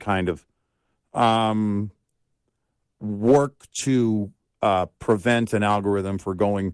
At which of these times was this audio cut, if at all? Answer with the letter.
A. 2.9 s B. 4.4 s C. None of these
C